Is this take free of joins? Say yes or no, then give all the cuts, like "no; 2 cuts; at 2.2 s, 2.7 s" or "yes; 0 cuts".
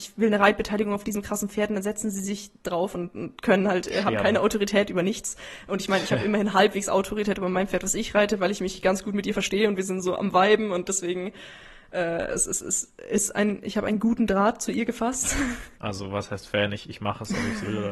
no; 1 cut; at 15.8 s